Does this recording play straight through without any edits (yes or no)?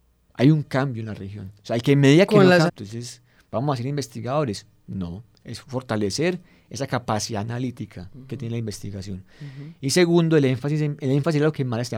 no